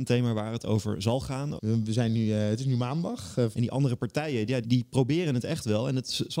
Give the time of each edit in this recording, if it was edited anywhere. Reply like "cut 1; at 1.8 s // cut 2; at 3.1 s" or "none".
cut 1; at 1.6 s // cut 2; at 3.5 s // cut 3; at 4.6 s